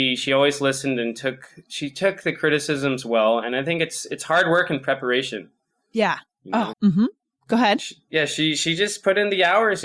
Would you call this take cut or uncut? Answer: cut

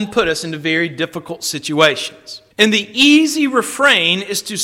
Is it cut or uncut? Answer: cut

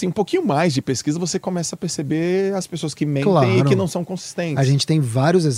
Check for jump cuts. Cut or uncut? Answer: uncut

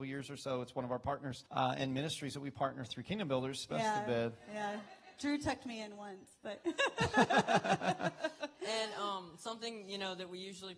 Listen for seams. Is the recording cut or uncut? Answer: cut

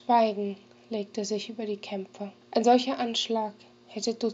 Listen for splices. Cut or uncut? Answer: cut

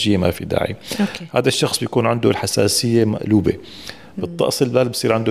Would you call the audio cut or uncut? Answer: uncut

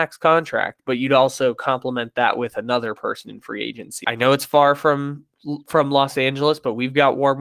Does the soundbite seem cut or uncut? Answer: cut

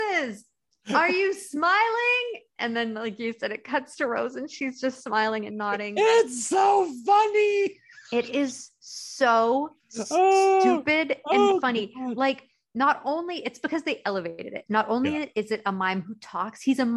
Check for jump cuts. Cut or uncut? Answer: uncut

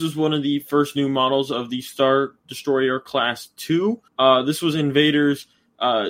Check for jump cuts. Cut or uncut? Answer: cut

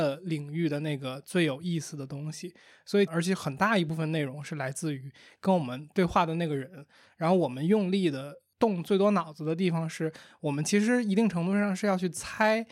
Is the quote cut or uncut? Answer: cut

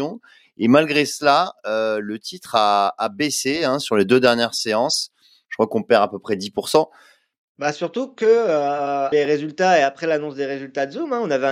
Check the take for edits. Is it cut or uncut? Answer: cut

